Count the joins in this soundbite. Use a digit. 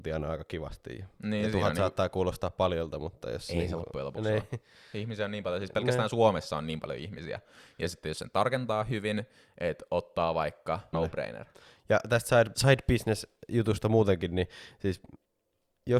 2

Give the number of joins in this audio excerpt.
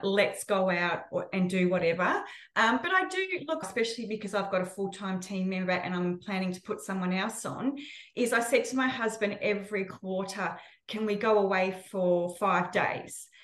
1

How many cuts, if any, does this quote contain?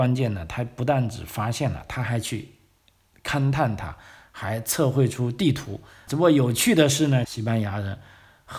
2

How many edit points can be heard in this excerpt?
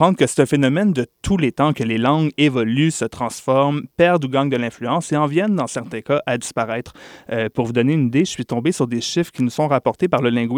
0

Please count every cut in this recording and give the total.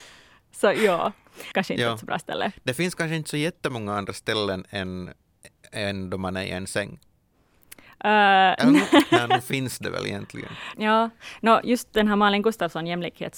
2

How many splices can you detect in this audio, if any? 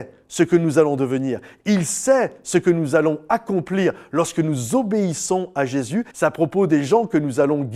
1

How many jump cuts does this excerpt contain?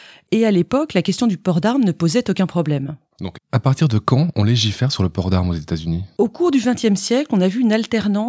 0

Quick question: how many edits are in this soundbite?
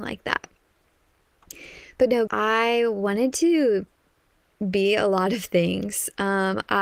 1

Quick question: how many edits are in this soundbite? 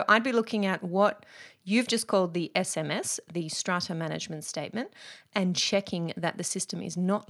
0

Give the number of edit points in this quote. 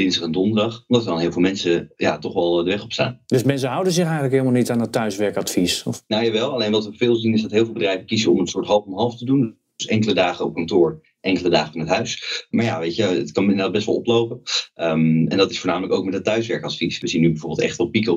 2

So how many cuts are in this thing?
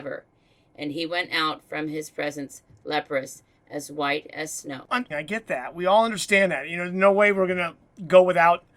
1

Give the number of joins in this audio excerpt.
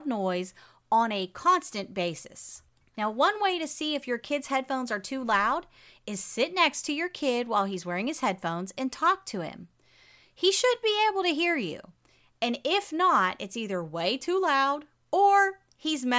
1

